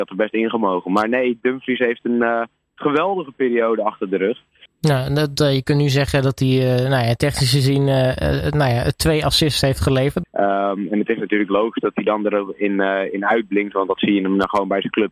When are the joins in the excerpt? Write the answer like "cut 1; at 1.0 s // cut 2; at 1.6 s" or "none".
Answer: cut 1; at 4.7 s // cut 2; at 10.2 s